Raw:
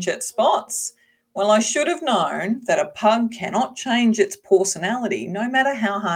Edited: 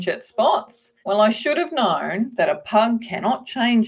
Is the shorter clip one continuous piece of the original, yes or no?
no